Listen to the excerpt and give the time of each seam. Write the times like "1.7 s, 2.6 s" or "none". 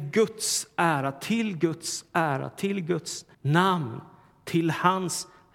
3.3 s